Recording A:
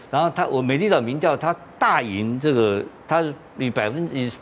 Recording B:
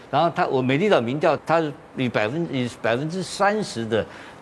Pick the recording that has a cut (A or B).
B